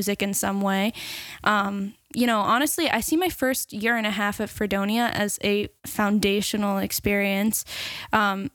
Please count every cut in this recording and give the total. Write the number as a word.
two